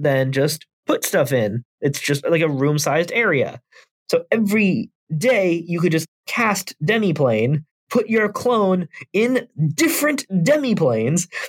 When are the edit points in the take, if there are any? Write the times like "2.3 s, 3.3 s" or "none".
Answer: none